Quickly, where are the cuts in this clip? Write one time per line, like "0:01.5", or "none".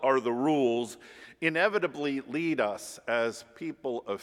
none